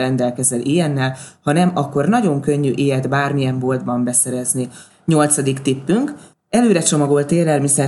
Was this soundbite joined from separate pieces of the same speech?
yes; 1 cut; at 4.9 s

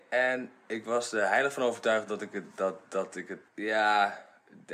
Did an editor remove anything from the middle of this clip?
yes; 1 cut; at 3.5 s

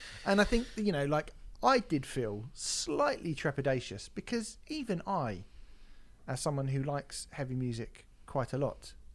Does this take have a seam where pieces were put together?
yes; 1 cut; at 1.5 s

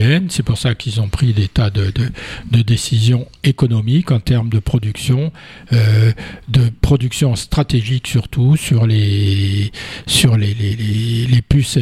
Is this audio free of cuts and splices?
yes; 0 cuts

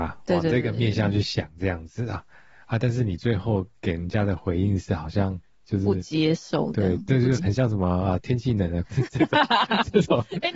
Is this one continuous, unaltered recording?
no; 2 cuts; at 7.4 s, 8.8 s

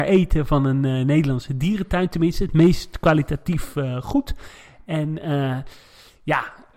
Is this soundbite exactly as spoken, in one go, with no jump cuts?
yes; 0 cuts

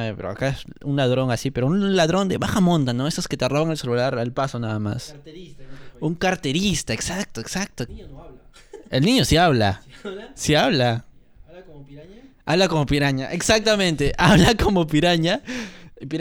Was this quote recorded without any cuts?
no; 1 cut; at 7.9 s

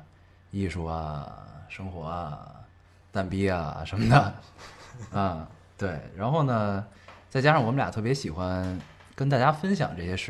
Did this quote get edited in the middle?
no; 0 cuts

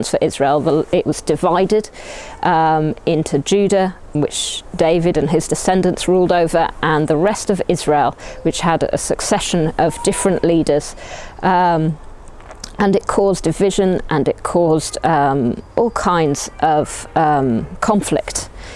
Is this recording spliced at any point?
yes; 1 cut; at 4.1 s

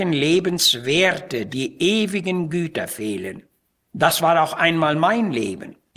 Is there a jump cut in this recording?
no; 0 cuts

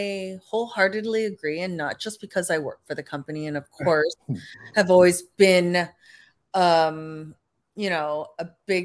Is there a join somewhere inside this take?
no; 0 cuts

